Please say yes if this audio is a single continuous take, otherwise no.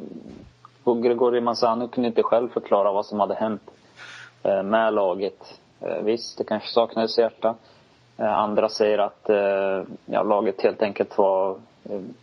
no